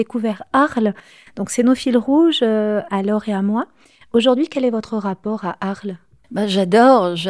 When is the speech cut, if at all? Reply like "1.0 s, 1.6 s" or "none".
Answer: 2.9 s